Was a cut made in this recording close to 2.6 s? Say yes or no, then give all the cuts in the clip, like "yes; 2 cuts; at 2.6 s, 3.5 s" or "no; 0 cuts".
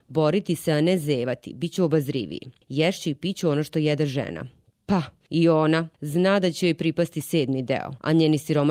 no; 0 cuts